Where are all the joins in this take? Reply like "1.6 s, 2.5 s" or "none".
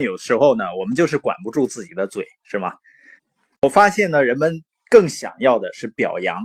3.2 s